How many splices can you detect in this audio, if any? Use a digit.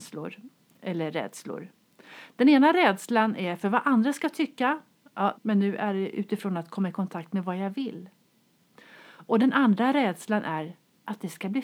1